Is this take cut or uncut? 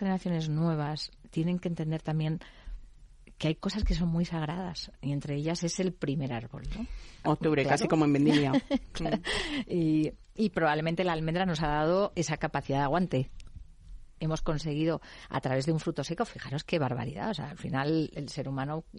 cut